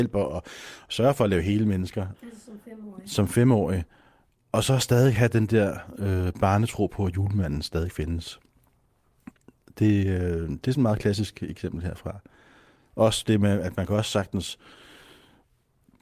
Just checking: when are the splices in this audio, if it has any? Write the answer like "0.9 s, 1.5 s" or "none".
2.1 s